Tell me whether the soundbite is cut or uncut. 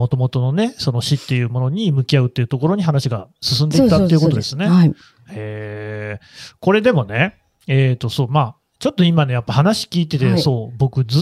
uncut